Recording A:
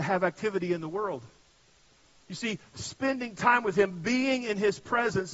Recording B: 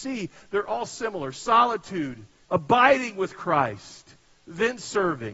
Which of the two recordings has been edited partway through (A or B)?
B